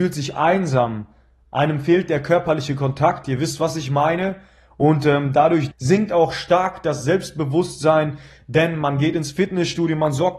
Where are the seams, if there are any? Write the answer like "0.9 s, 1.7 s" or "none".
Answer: 5.7 s

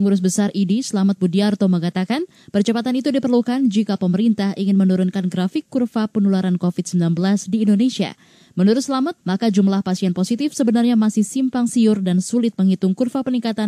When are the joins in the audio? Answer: 9.2 s

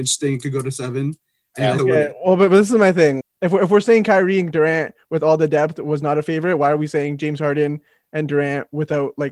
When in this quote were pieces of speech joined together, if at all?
1.8 s, 3.2 s

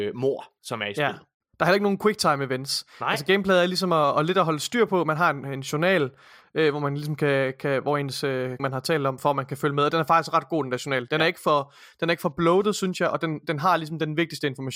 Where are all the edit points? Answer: 8.6 s

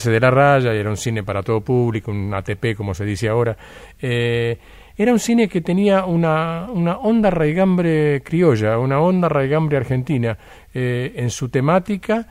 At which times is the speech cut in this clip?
none

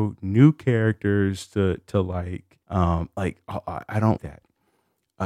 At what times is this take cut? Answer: 2.6 s, 4.2 s

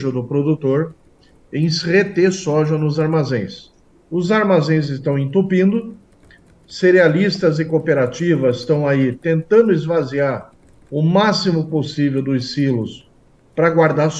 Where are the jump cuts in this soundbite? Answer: none

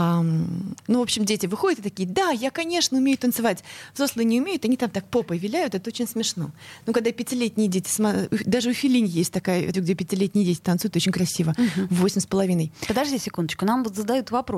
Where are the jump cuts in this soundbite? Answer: 9.7 s

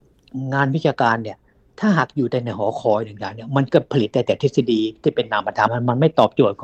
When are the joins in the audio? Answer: 5.7 s

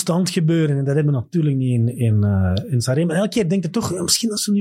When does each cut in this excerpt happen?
none

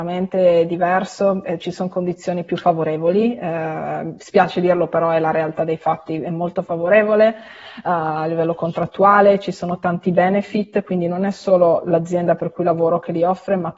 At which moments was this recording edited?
none

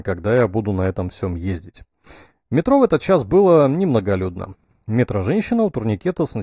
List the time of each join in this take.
none

